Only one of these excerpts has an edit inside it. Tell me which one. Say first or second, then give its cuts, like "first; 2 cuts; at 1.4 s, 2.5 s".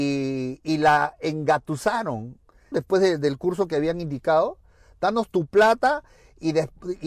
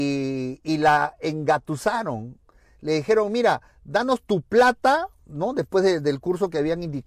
first; 1 cut; at 2.7 s